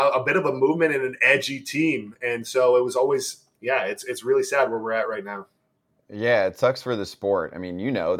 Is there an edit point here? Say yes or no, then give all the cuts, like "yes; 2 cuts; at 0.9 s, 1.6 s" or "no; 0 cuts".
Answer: no; 0 cuts